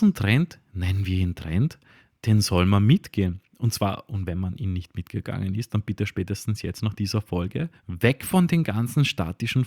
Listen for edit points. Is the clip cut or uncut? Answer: cut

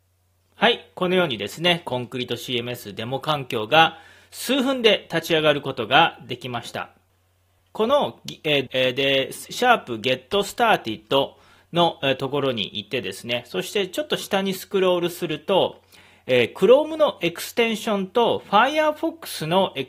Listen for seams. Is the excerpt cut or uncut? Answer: cut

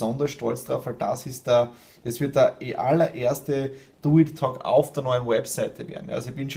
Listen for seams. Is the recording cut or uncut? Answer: uncut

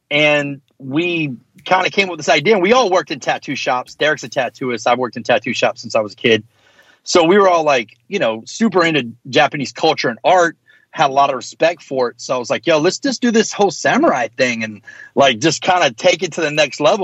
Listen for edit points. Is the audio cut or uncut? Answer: uncut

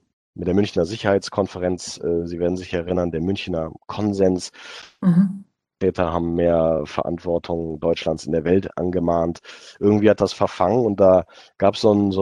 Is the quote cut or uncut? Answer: cut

